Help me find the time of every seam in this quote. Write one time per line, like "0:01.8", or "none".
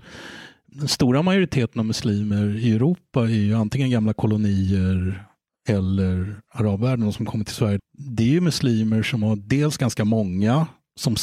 0:07.8

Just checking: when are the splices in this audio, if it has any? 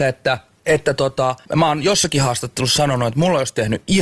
0:01.4

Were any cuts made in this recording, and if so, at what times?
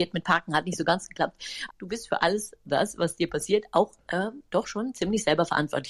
0:01.7

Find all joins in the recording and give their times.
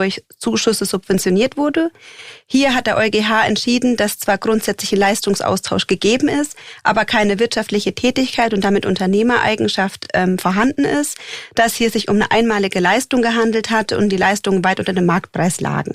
none

